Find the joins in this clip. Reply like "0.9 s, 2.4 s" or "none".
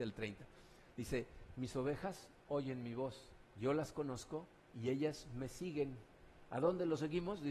3.5 s